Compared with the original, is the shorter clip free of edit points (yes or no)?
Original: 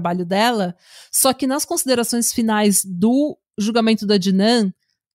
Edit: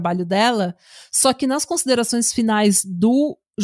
yes